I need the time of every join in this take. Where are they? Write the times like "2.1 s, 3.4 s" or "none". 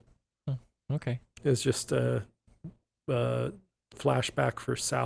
none